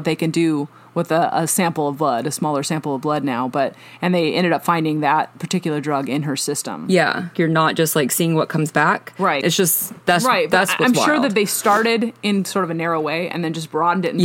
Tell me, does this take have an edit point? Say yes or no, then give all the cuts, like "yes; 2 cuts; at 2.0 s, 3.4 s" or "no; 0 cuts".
yes; 2 cuts; at 7.3 s, 9.4 s